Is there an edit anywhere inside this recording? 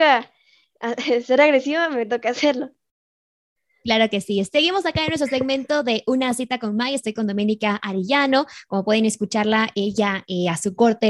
no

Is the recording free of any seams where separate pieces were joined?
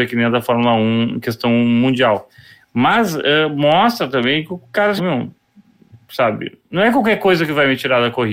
no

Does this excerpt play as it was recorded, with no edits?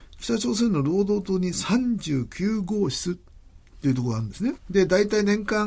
no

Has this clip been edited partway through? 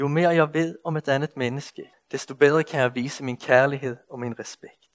yes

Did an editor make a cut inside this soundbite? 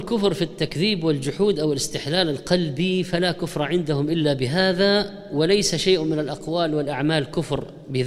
no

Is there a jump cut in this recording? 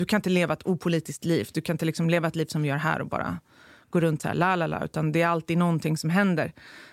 no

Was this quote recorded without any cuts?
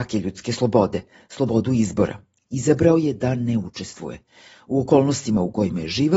yes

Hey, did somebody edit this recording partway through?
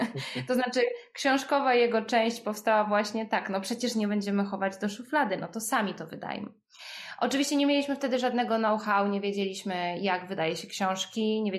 no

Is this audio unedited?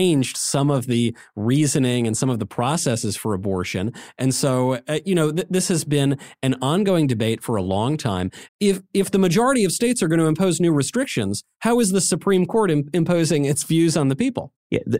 no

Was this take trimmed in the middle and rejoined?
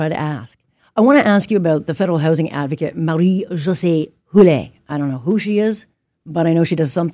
no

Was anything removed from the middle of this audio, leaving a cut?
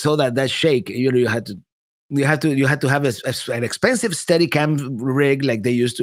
no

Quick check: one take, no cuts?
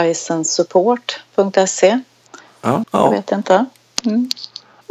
no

